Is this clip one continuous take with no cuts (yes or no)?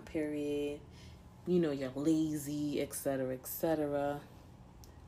yes